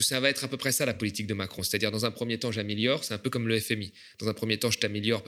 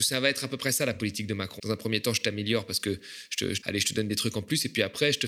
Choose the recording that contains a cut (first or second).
second